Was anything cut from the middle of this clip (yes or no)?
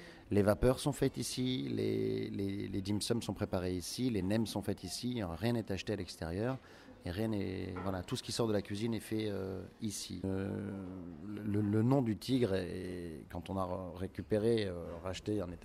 yes